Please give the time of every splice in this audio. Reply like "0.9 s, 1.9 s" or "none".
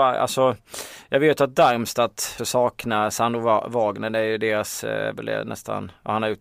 2.4 s